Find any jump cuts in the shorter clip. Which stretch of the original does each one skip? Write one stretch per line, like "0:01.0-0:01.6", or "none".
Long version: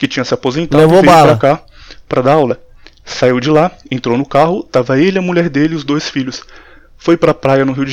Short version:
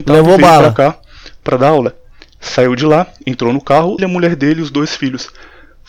0:04.6-0:05.1